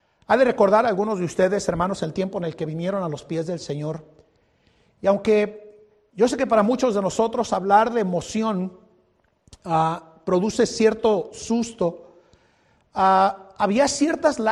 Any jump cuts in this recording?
no; 0 cuts

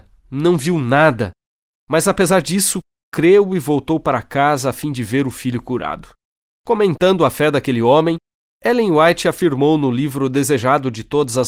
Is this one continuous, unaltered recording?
yes; 0 cuts

